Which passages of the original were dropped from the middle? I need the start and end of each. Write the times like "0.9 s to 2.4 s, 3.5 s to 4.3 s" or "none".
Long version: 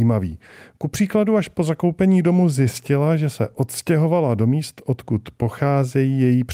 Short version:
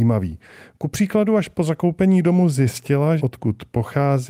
3.2 s to 4.8 s